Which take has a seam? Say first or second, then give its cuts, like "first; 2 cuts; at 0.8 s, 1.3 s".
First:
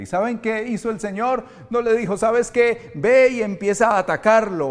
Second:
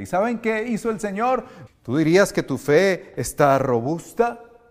second; 1 cut; at 1.7 s